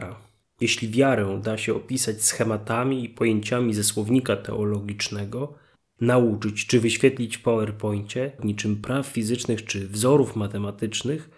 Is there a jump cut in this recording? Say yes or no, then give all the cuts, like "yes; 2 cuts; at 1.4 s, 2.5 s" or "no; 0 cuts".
yes; 2 cuts; at 6.0 s, 8.4 s